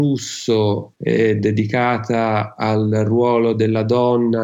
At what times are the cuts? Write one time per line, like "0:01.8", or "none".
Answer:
0:00.9